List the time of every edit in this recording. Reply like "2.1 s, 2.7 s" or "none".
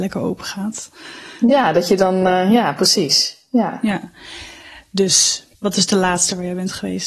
5.5 s